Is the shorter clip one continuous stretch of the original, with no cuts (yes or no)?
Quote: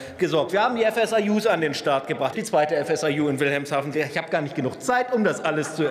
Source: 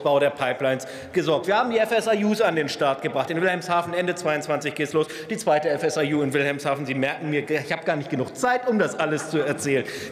no